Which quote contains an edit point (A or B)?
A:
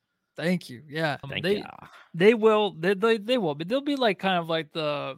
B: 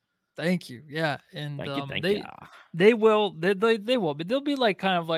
A